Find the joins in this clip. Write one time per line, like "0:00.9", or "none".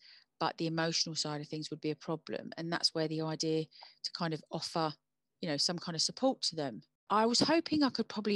none